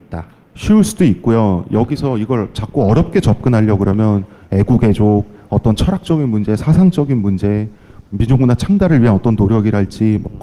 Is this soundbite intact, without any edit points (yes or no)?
no